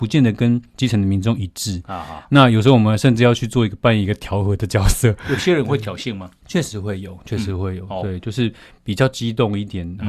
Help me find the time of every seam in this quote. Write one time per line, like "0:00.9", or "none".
none